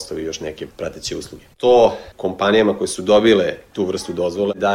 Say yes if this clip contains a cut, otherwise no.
yes